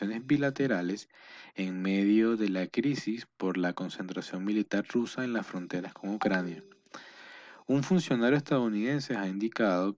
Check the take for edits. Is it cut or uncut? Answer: uncut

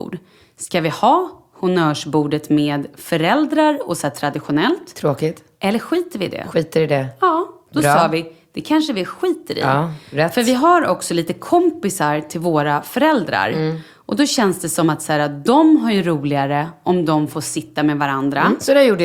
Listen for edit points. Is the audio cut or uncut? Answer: uncut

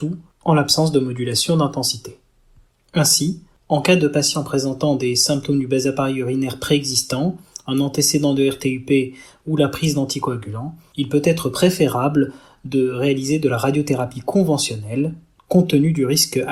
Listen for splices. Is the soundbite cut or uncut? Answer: uncut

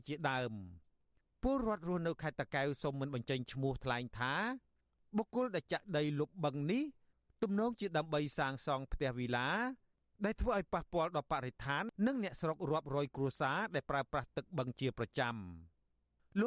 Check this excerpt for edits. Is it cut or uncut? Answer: uncut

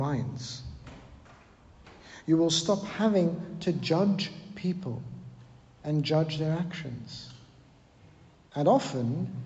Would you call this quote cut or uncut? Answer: uncut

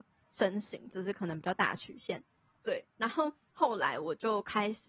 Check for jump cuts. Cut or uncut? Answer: cut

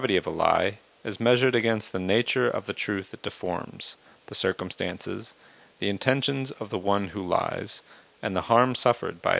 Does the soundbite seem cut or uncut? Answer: uncut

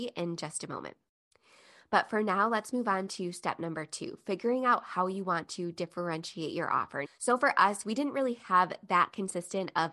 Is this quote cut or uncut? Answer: cut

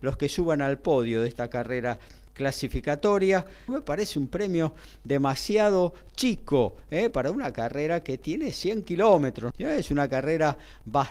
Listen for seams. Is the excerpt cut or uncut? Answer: cut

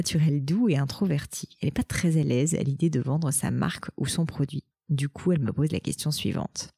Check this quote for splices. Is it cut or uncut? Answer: uncut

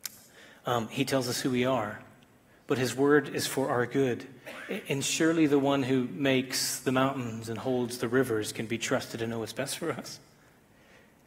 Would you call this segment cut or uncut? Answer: uncut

